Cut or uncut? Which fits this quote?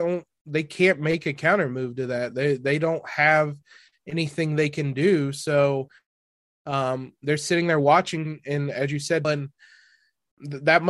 cut